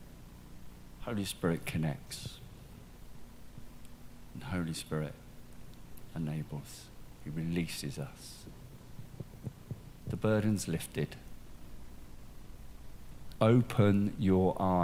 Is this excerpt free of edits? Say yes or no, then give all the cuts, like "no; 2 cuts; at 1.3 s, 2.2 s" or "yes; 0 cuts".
no; 2 cuts; at 10.0 s, 13.4 s